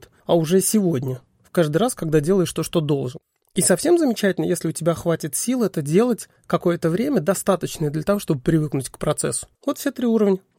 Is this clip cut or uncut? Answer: uncut